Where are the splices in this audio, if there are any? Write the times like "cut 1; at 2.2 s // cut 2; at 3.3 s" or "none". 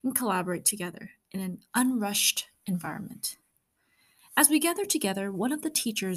none